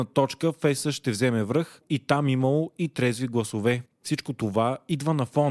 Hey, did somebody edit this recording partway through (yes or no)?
yes